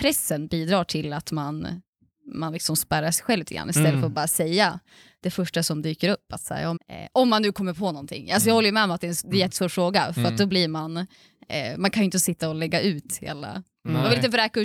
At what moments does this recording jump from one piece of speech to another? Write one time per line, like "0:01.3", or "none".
0:06.8